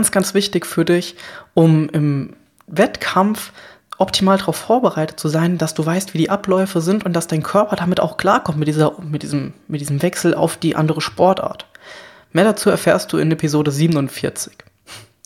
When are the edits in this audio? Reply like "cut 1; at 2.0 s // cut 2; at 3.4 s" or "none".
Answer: none